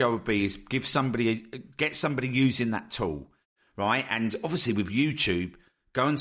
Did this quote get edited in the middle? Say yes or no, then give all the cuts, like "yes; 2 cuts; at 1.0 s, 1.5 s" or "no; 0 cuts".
no; 0 cuts